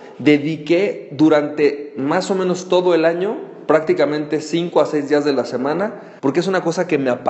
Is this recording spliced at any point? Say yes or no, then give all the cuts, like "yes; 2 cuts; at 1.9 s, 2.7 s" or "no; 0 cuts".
yes; 1 cut; at 6.2 s